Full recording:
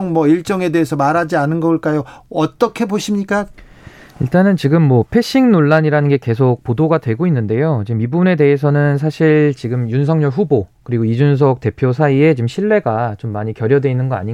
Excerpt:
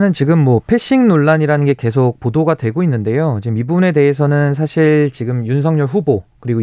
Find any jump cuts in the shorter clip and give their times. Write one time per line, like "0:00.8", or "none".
none